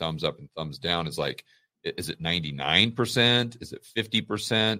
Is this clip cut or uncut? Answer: uncut